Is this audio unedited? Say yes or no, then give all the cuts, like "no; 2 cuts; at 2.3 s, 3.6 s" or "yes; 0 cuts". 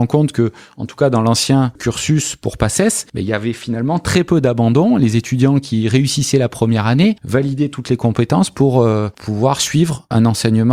yes; 0 cuts